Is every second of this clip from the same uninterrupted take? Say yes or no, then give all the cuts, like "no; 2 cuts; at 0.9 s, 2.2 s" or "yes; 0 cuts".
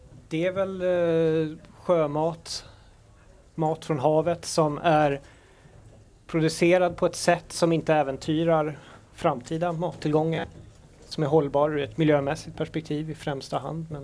yes; 0 cuts